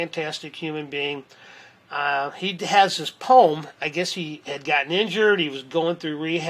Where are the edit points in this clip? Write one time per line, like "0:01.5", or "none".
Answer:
none